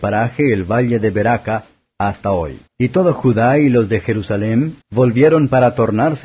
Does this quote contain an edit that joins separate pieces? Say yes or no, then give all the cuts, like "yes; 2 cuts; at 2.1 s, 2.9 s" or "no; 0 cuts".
yes; 2 cuts; at 2.7 s, 4.8 s